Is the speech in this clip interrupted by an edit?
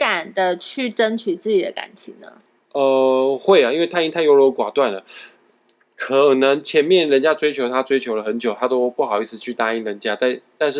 no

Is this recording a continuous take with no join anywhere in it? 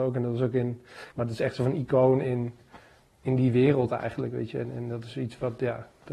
no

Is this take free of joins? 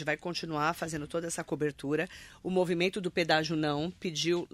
yes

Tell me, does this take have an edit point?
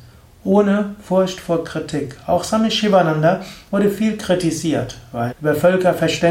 yes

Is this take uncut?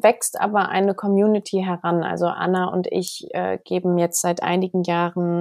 yes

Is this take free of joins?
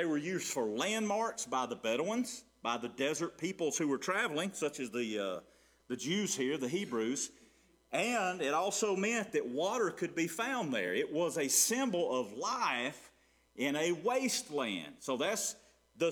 yes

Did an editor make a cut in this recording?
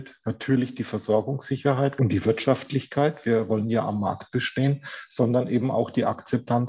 yes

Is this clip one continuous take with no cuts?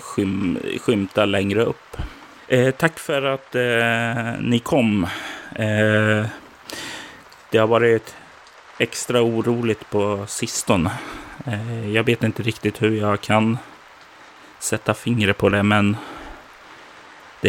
yes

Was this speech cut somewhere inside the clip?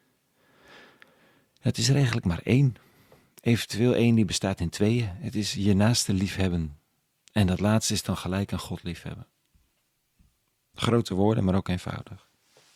no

